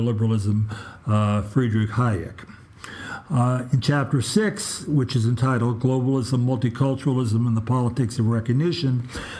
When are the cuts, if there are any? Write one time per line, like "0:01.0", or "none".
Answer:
none